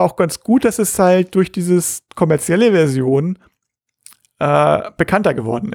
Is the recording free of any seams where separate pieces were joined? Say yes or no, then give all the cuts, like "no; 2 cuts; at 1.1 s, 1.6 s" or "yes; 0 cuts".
yes; 0 cuts